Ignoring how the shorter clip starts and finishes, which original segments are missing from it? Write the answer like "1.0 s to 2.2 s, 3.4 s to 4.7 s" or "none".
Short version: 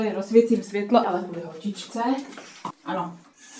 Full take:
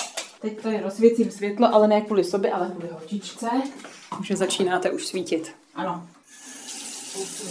1.7 s to 2.5 s, 4.2 s to 5.6 s